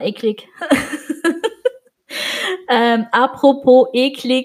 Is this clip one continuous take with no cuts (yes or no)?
yes